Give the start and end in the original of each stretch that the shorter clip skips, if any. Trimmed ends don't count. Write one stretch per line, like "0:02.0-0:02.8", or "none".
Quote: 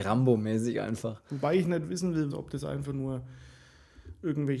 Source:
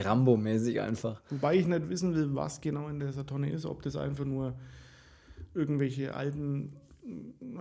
0:02.3-0:03.6